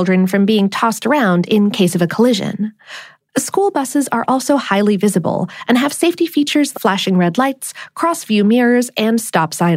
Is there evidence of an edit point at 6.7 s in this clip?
yes; 1 cut; at 6.7 s

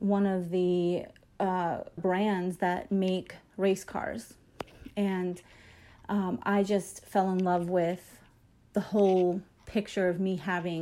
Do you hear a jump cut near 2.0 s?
yes; 1 cut; at 2.0 s

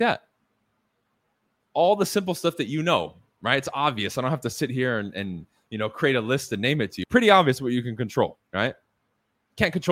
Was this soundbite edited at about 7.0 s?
yes; 2 cuts; at 7.0 s, 8.4 s

